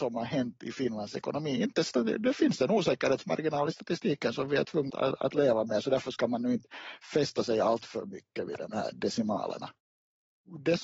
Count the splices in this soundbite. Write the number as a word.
one